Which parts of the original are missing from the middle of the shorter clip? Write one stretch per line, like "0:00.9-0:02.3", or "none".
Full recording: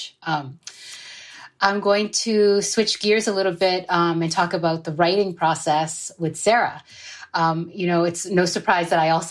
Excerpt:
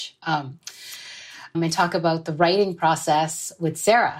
0:01.5-0:04.1